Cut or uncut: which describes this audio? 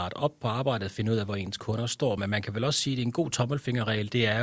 uncut